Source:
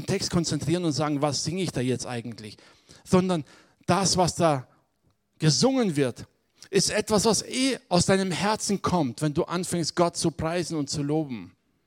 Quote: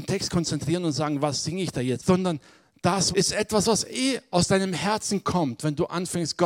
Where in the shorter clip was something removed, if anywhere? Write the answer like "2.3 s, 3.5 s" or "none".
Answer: 2.0 s, 3.1 s